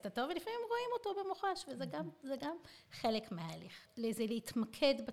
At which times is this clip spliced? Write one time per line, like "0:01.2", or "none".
0:03.9